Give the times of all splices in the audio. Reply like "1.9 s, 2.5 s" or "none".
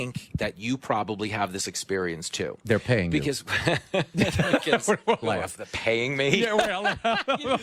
5.2 s

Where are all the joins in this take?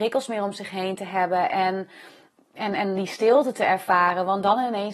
none

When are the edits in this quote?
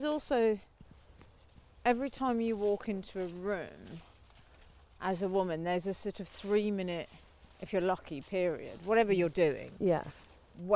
none

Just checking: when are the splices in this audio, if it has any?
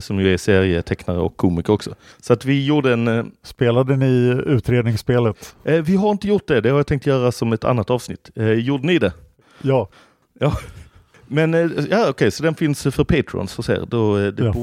none

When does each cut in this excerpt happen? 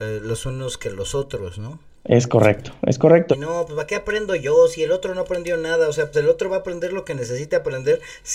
3.3 s, 6.1 s

